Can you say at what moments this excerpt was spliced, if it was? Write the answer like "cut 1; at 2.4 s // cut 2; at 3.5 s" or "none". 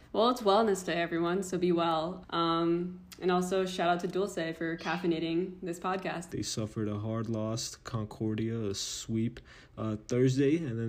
cut 1; at 2.2 s // cut 2; at 6.3 s